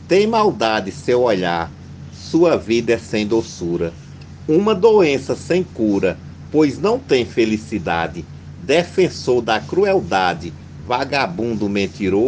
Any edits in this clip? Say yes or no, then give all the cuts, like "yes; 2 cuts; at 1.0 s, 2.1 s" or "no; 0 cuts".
no; 0 cuts